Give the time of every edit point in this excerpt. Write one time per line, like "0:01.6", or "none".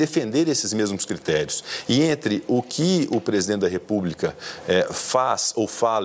none